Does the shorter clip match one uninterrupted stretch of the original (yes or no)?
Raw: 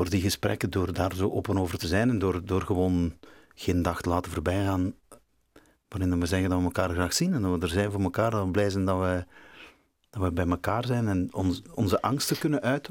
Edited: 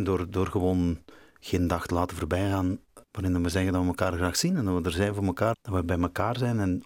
no